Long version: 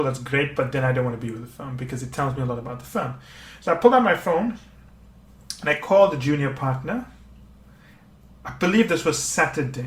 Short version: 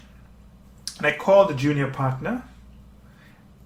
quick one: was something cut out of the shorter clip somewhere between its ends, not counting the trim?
no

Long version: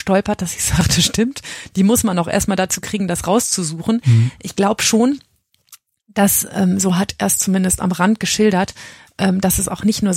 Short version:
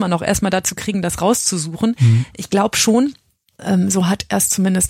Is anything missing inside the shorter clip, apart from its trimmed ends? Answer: yes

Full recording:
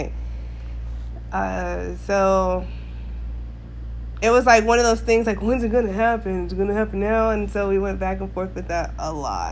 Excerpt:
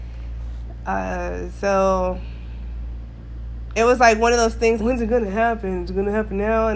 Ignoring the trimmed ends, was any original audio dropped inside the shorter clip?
yes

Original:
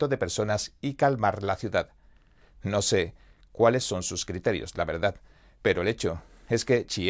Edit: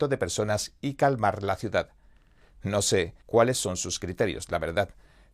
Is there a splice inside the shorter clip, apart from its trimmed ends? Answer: yes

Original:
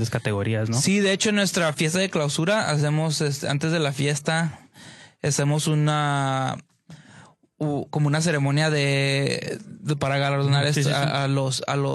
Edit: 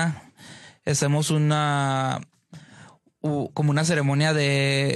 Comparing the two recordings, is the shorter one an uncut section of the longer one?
yes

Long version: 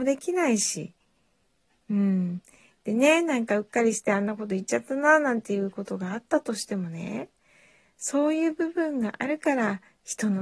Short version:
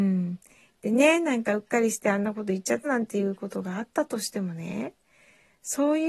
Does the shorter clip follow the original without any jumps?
no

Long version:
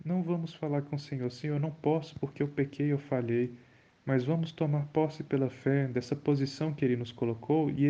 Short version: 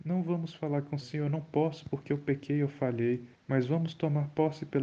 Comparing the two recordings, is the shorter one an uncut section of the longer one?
no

